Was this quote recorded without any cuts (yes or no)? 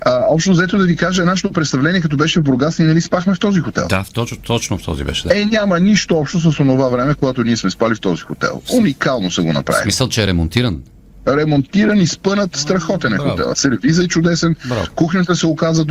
yes